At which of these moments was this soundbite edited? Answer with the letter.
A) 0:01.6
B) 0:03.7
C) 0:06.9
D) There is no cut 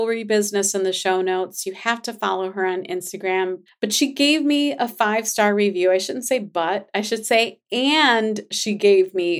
B